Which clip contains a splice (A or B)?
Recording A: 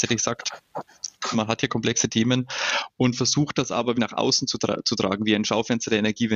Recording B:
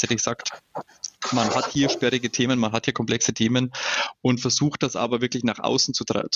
A